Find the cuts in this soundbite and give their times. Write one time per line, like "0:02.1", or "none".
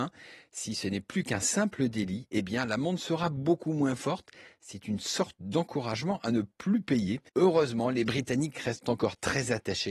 0:07.3